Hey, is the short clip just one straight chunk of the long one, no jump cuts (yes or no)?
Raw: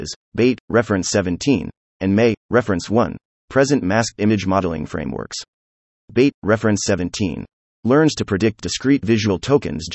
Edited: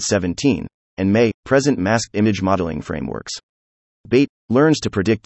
no